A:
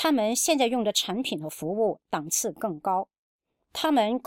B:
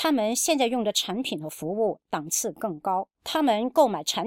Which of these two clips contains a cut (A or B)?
B